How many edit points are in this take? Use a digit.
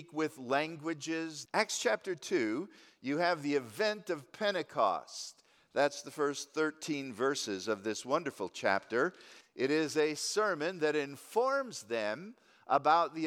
2